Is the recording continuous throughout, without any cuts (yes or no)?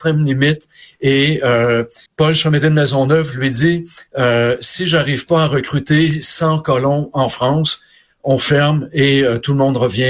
no